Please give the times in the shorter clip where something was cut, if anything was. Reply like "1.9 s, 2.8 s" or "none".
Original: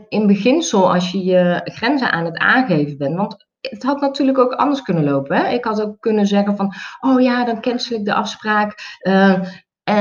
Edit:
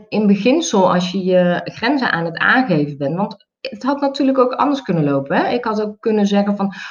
none